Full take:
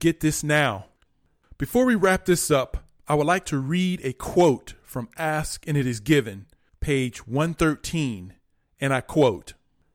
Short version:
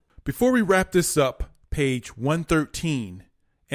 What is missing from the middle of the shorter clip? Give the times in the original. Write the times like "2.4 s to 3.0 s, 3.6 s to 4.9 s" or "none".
3.0 s to 6.7 s